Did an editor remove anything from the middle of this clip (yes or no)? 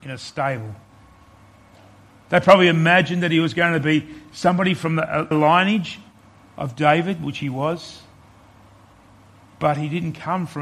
yes